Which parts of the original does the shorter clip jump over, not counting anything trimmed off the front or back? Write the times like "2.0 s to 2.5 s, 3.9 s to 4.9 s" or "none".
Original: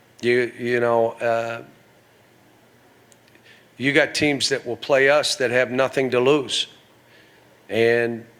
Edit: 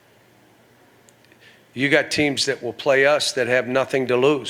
none